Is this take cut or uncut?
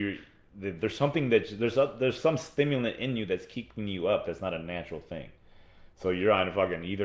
uncut